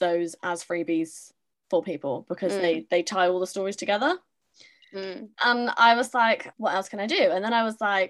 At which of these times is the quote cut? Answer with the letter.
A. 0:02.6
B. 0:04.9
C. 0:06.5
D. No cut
C